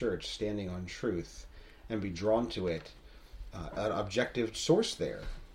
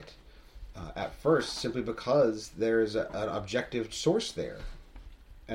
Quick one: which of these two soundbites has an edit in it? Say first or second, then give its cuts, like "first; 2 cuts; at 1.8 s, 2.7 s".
first; 1 cut; at 3.7 s